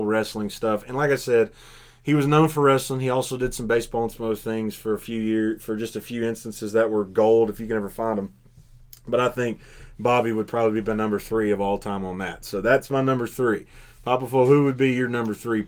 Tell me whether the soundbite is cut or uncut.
uncut